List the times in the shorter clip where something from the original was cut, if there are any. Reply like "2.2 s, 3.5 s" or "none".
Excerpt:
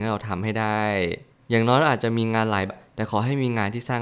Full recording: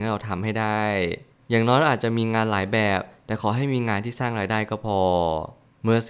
2.7 s